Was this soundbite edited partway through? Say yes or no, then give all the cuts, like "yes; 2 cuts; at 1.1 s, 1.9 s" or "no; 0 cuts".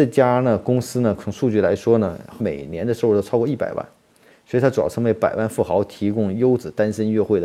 yes; 1 cut; at 2.4 s